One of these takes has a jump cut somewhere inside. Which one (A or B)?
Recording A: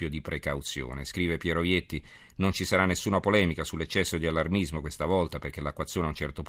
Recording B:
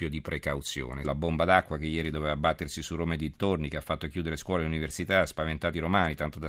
B